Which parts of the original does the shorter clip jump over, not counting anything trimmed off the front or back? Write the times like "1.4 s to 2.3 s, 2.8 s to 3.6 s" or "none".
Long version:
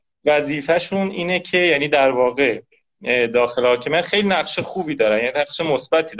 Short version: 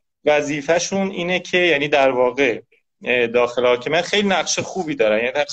none